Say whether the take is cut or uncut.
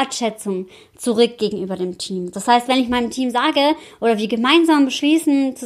uncut